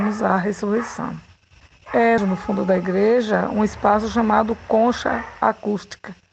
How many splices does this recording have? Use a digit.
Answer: 1